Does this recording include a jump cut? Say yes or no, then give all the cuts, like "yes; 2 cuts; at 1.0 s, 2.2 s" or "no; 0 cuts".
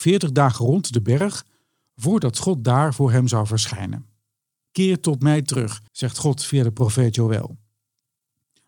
yes; 2 cuts; at 4.7 s, 5.9 s